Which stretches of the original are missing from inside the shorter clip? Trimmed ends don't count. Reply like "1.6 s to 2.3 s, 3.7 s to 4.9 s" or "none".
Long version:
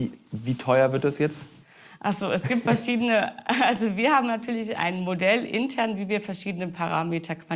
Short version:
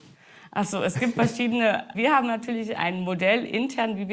3.4 s to 3.9 s